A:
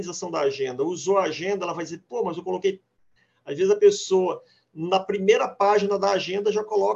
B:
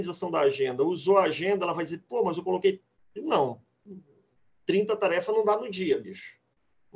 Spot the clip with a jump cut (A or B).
B